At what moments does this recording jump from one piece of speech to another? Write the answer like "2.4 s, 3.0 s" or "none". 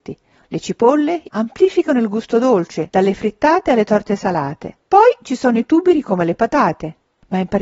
1.3 s, 2.9 s, 4.8 s